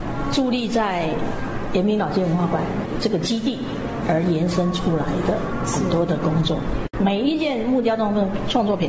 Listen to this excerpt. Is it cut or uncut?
cut